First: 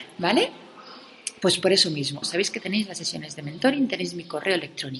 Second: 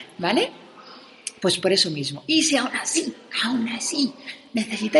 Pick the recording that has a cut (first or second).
first